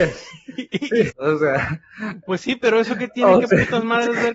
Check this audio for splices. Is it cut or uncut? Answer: cut